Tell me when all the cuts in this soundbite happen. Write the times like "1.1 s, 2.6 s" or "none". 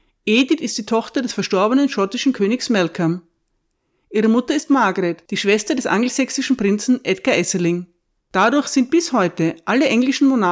8.2 s